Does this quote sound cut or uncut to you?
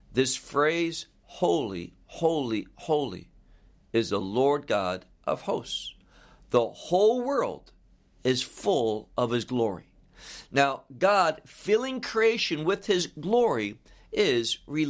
uncut